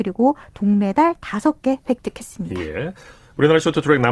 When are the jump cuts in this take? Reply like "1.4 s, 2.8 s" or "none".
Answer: none